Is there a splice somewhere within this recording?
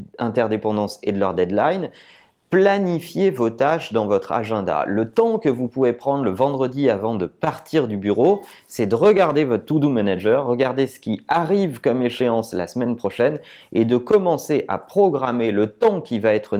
no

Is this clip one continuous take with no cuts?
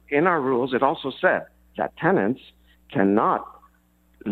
yes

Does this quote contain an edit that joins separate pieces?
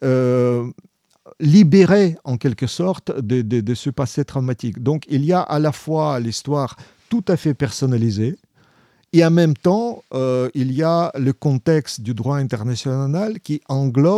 no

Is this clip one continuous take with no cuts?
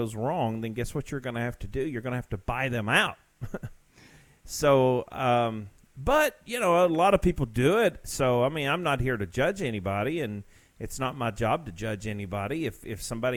yes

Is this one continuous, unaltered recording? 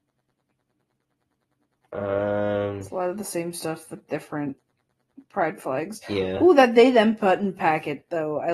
yes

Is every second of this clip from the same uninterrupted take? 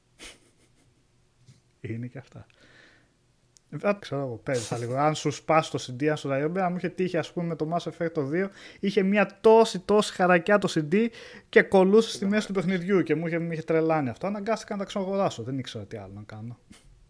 no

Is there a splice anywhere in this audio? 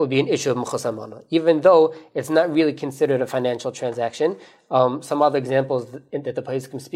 no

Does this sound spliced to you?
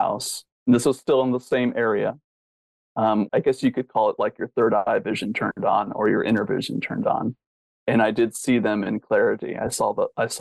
yes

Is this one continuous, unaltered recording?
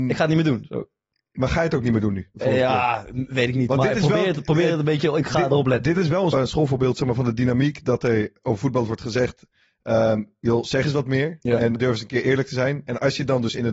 no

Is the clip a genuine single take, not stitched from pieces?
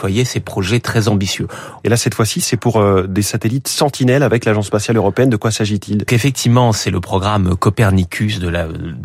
no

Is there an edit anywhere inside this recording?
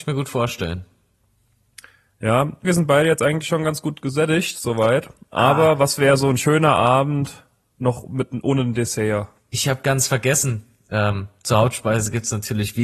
yes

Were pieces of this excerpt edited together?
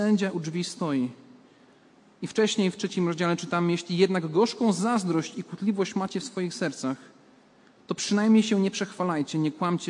no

